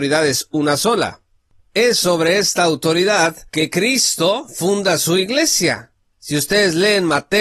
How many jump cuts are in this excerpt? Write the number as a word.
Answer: one